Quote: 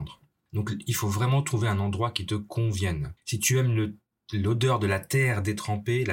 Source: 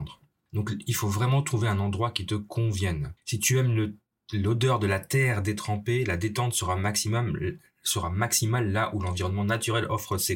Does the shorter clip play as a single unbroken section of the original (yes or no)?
yes